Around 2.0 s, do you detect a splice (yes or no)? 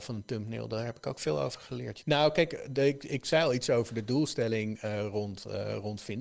yes